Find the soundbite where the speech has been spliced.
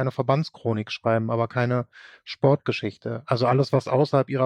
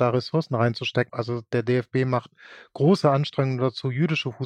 second; 1 cut; at 1.1 s

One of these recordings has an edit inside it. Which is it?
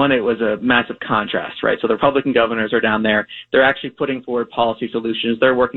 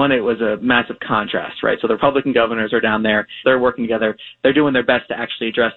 second; 1 cut; at 3.4 s

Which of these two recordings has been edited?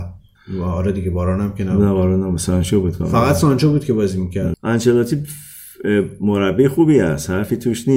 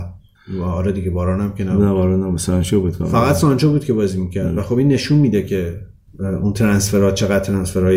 first; 1 cut; at 4.5 s

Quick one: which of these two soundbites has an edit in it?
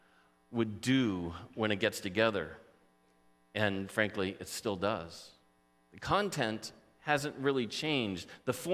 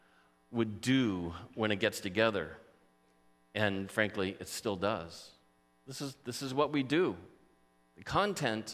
first; 1 cut; at 5.8 s

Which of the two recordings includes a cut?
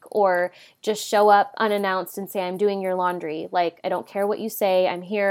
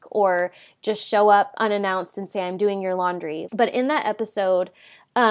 second; 1 cut; at 3.5 s

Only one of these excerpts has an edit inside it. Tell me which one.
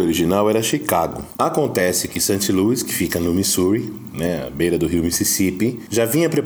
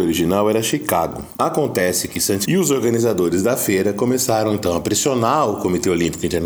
second; 1 cut; at 2.4 s

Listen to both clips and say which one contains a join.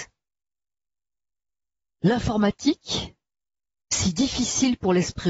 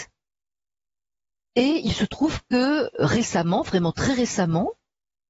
second; 1 cut; at 1.5 s

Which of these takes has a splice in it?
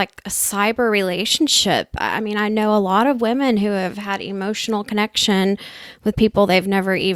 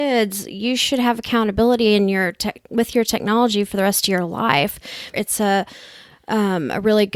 second; 1 cut; at 5.1 s

